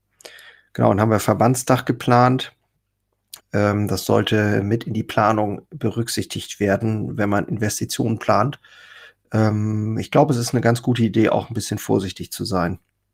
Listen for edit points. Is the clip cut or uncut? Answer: cut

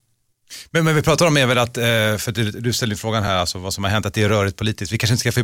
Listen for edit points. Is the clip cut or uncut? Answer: uncut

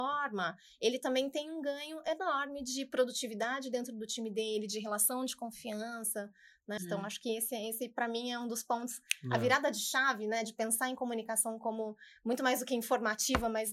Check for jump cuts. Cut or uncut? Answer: cut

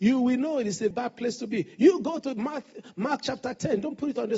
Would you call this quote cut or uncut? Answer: cut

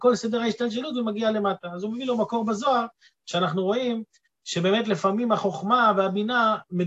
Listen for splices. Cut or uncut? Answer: uncut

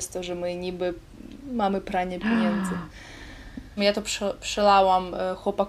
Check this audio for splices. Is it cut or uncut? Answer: cut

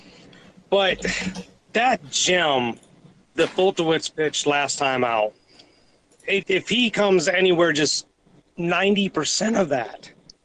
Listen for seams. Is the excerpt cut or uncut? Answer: cut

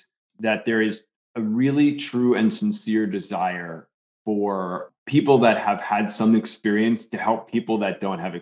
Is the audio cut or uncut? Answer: uncut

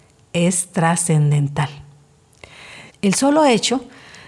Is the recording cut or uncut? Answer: cut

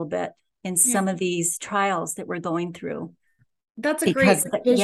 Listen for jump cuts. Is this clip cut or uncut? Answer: uncut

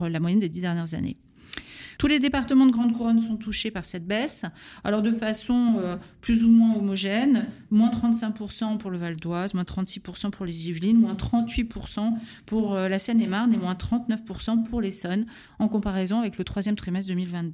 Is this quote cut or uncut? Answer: cut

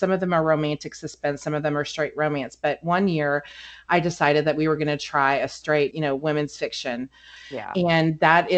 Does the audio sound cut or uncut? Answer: cut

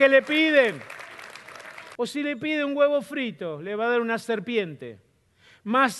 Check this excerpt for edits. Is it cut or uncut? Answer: cut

